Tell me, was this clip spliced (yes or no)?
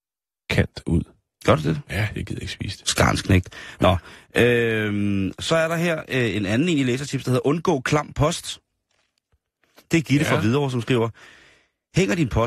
no